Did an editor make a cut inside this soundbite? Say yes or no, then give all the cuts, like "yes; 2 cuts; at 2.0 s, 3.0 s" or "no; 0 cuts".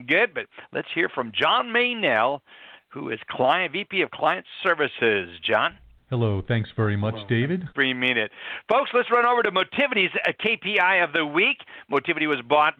yes; 1 cut; at 7.7 s